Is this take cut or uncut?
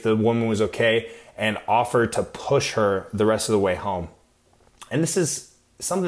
uncut